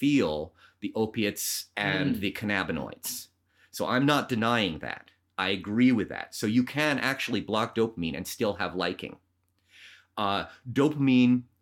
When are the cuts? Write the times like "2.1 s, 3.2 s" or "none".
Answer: none